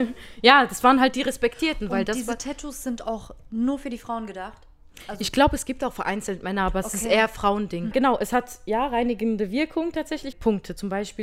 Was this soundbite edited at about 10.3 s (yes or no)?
yes